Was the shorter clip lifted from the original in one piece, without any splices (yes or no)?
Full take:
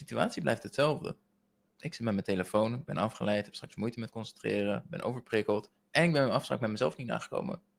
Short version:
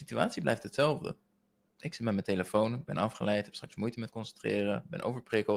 yes